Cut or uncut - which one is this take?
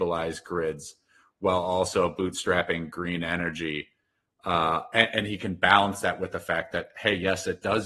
uncut